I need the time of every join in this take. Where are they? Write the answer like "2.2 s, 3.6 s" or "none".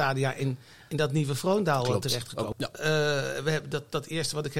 2.5 s